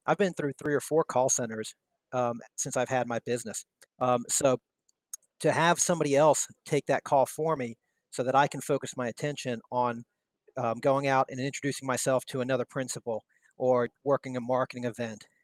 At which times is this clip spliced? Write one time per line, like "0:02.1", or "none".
0:03.9